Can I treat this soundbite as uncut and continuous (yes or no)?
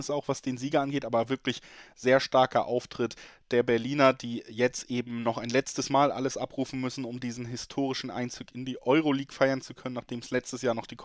yes